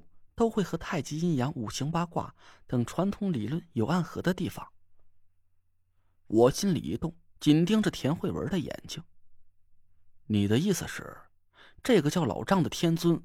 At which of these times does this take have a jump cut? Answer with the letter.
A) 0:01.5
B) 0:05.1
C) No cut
C